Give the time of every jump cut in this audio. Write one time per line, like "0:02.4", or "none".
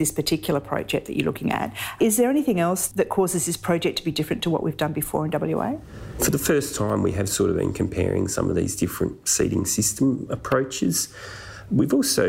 none